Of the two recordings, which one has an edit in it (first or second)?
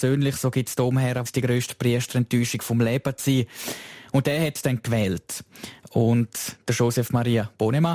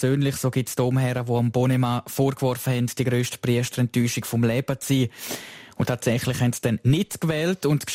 first